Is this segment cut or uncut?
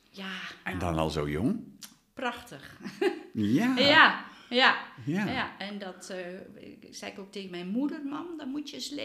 uncut